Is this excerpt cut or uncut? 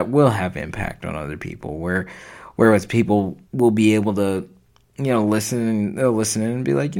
cut